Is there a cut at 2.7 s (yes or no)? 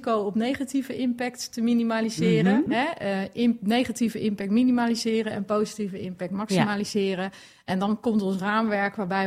yes